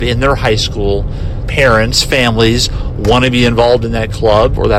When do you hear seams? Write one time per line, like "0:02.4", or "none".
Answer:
0:01.4